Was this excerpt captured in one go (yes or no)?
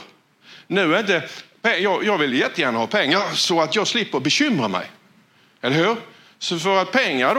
yes